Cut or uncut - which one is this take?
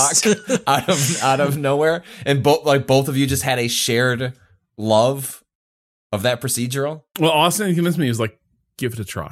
uncut